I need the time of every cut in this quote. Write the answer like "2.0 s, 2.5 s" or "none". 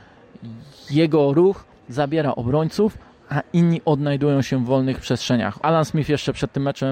5.6 s